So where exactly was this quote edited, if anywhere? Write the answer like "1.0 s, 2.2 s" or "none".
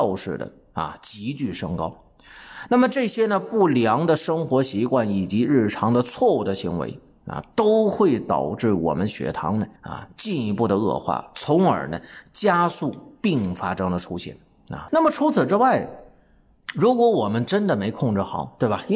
9.8 s, 14.9 s